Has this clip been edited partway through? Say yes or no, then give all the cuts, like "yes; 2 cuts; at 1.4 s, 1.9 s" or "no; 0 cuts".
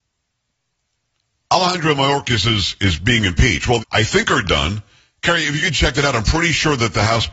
yes; 1 cut; at 3.8 s